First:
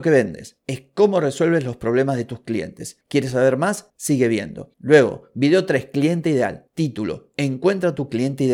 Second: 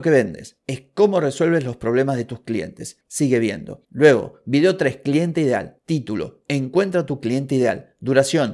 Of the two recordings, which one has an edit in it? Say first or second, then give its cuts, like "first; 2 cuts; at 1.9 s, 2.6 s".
second; 1 cut; at 3.0 s